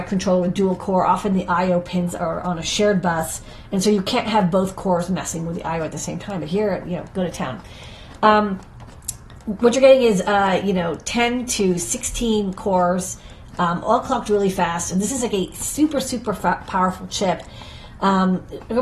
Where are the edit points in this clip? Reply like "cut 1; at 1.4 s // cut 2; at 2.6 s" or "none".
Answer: none